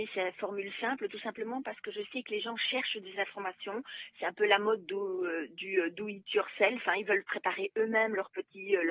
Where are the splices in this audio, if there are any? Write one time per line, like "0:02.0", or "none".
none